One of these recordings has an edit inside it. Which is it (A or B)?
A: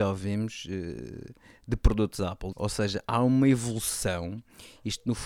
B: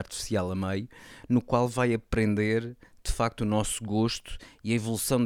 A